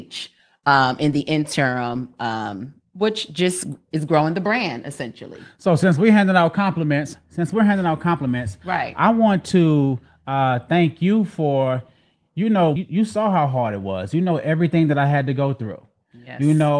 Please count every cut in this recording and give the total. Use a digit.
1